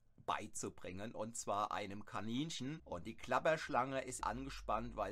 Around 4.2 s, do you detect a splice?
yes; 2 cuts; at 2.8 s, 4.2 s

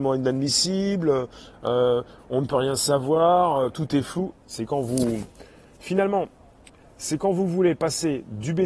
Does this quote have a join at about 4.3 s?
yes; 1 cut; at 4.3 s

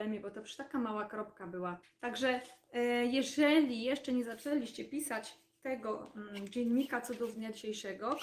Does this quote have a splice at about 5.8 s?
no; 1 cut; at 1.8 s

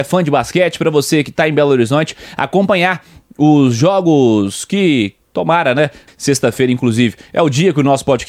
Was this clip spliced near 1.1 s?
no; 1 cut; at 6.1 s

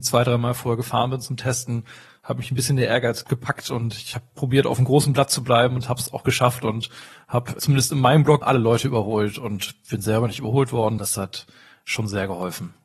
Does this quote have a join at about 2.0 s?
no; 2 cuts; at 8.4 s, 11.0 s

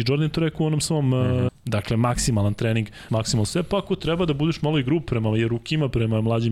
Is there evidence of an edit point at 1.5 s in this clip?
yes; 2 cuts; at 1.5 s, 3.1 s

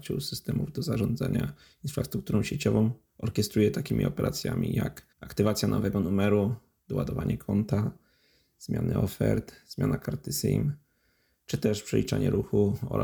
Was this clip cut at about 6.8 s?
no; 1 cut; at 5.1 s

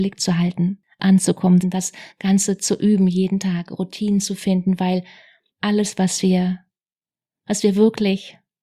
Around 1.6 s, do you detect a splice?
yes; 1 cut; at 1.6 s

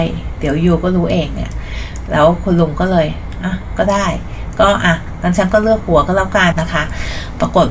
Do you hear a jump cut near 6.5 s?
yes; 1 cut; at 6.5 s

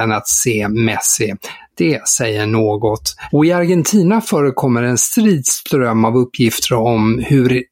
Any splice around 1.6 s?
no; 1 cut; at 3.3 s

